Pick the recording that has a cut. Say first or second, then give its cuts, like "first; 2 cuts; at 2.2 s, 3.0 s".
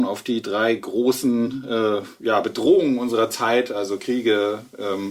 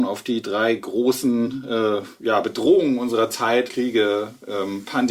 second; 1 cut; at 3.7 s